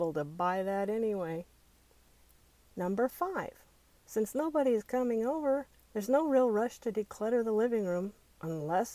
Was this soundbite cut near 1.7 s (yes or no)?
no